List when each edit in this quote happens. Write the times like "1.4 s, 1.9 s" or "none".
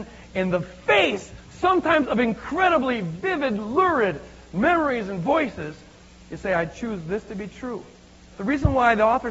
8.3 s